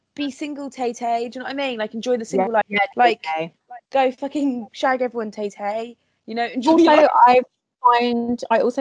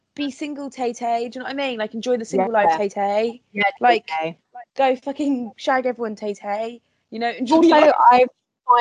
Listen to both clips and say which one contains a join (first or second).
first